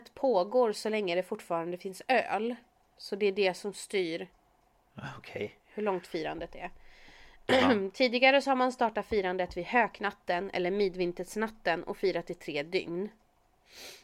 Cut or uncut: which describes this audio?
uncut